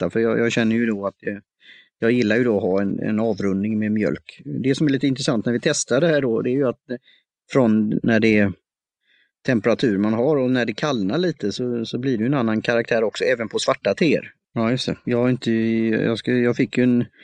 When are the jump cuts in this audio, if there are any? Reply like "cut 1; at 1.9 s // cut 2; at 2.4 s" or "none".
cut 1; at 14.4 s